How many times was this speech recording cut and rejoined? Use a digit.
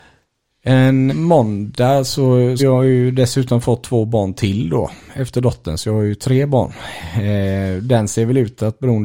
2